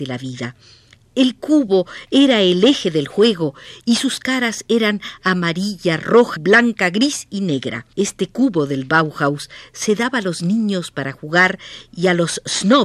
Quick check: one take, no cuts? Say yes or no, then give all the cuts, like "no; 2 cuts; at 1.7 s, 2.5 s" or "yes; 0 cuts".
no; 2 cuts; at 6.4 s, 7.9 s